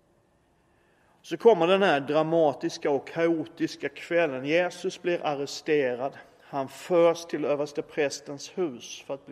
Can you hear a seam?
no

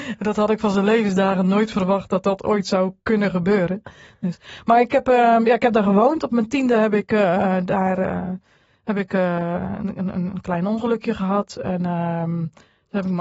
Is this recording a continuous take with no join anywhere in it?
yes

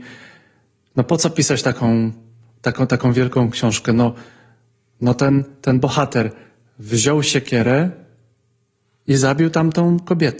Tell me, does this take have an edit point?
no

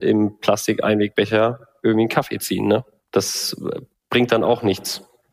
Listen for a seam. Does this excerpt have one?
no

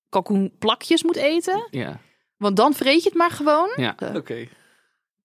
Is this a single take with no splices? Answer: no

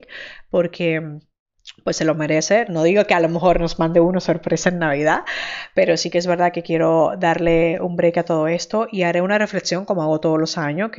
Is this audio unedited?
yes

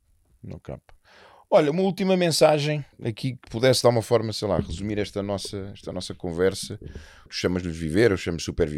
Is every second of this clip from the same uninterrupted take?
no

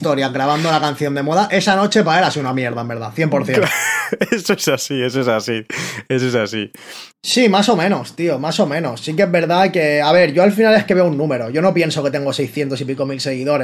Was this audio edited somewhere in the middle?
yes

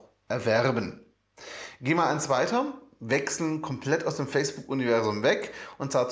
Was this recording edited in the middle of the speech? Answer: no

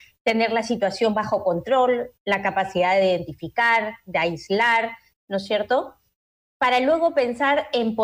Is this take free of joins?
yes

